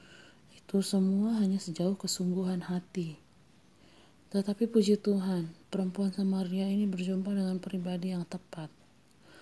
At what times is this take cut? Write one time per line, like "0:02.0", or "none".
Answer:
0:04.2
0:05.6